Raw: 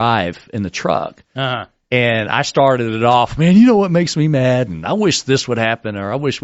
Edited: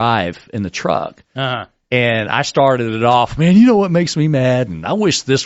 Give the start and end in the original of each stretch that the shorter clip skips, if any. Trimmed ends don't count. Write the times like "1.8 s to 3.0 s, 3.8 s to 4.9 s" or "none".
none